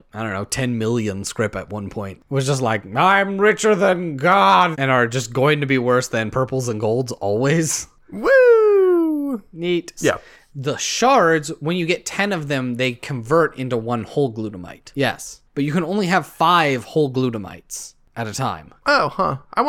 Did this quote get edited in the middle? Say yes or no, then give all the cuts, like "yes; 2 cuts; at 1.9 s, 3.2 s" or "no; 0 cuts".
yes; 3 cuts; at 4.7 s, 10.0 s, 14.9 s